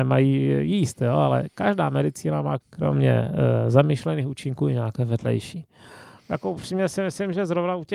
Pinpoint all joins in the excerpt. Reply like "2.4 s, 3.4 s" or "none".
2.6 s, 6.2 s